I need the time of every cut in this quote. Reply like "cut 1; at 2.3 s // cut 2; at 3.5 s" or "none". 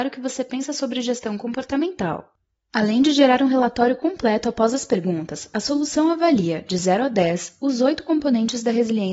none